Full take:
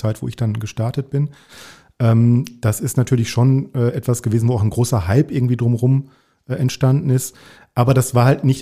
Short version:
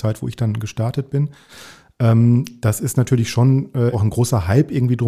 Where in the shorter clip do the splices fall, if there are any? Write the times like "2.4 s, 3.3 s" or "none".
3.9 s